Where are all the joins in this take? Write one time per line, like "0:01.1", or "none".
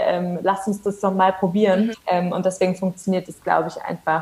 0:01.9